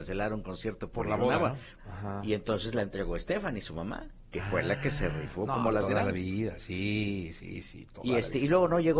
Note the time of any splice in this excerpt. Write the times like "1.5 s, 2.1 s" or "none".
1.8 s